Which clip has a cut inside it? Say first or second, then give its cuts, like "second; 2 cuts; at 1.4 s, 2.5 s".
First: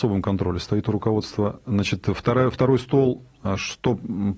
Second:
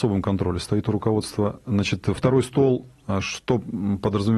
second; 1 cut; at 2.2 s